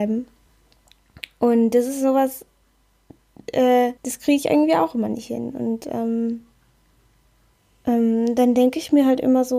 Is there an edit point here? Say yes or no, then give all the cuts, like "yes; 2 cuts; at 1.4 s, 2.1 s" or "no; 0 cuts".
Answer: yes; 1 cut; at 4.0 s